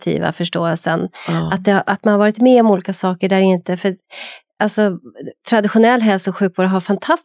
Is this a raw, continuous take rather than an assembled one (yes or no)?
yes